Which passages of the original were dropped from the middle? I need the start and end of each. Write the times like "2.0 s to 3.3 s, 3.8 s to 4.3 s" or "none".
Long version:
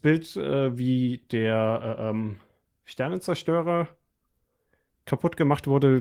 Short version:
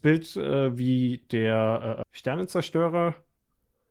2.0 s to 2.8 s

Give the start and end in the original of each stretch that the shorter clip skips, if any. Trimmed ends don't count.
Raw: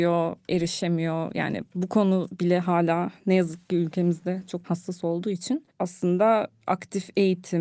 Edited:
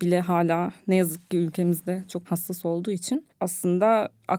none

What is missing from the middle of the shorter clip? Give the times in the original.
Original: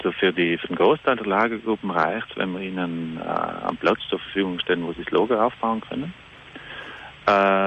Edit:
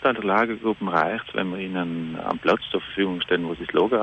3.2 s to 3.6 s

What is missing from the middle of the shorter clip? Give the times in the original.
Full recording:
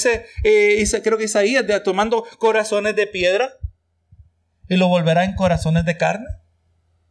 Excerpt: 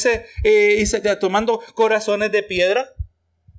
1.0 s to 1.7 s

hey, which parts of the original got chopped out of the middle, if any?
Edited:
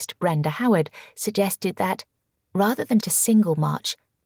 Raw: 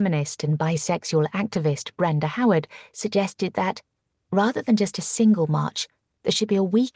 4.8 s to 4.9 s

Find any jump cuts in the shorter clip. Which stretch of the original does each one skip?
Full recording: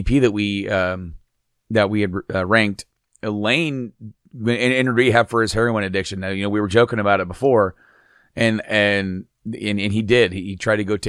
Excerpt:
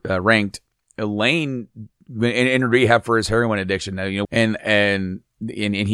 6.5 s to 8.3 s

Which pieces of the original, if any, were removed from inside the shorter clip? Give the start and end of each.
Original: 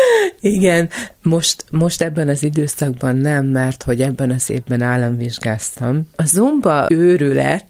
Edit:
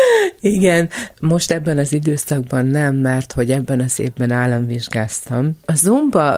1.1 s to 1.6 s

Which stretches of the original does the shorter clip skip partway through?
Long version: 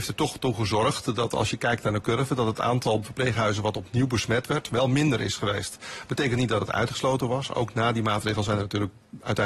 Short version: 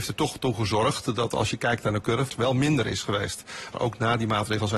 2.3 s to 4.6 s, 6.1 s to 7.5 s

